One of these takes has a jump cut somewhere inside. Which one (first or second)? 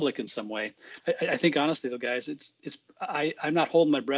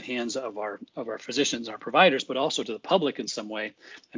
first